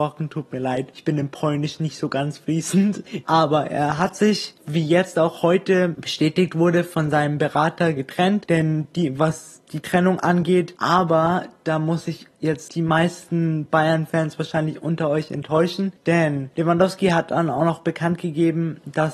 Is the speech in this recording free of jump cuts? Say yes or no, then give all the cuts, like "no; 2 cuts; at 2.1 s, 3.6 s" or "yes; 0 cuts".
no; 2 cuts; at 3.2 s, 10.8 s